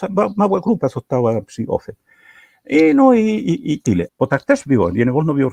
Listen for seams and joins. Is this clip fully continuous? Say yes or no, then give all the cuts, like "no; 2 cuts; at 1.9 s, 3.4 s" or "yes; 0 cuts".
no; 1 cut; at 4.1 s